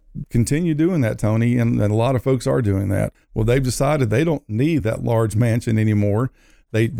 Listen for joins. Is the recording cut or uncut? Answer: cut